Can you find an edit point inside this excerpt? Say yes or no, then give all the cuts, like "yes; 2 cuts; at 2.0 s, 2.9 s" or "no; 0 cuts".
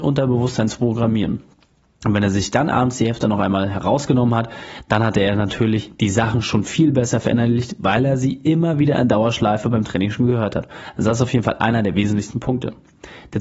no; 0 cuts